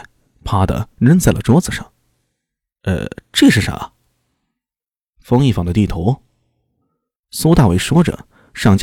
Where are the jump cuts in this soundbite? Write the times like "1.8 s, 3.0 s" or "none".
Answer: none